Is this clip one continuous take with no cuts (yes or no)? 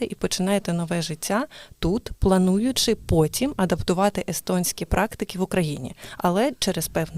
yes